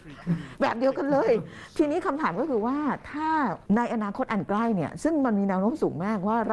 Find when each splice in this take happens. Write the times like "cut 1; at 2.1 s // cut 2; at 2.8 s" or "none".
cut 1; at 3.7 s